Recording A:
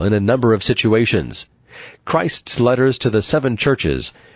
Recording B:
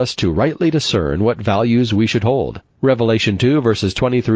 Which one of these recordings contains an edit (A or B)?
B